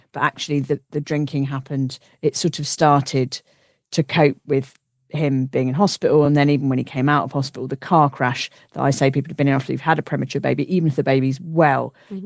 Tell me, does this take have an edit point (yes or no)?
no